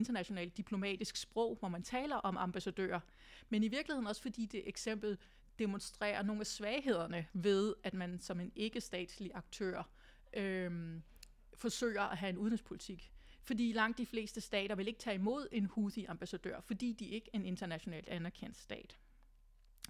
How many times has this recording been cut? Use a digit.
1